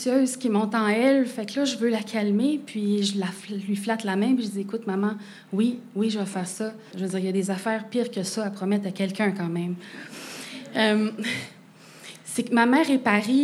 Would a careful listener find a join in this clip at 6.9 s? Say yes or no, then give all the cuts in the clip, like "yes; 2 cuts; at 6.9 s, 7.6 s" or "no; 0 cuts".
yes; 1 cut; at 6.9 s